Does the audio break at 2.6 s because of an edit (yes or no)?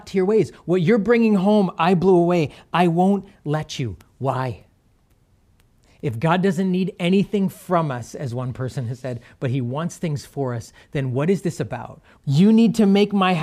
no